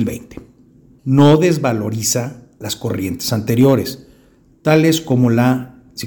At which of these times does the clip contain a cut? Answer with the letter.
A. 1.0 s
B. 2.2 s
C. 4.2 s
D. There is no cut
A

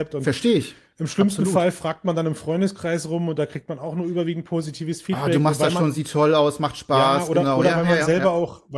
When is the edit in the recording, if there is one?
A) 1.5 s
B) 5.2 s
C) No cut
C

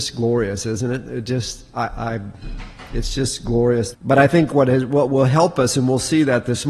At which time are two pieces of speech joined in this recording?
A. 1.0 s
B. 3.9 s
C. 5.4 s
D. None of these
B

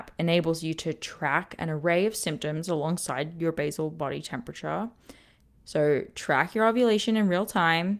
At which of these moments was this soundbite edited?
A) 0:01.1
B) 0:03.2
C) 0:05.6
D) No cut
C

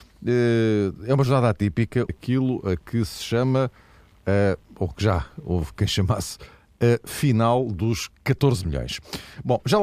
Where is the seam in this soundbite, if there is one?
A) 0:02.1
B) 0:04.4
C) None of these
A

